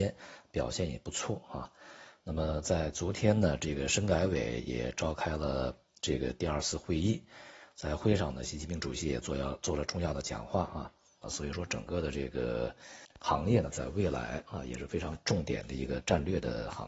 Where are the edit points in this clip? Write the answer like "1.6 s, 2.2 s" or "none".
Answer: 11.2 s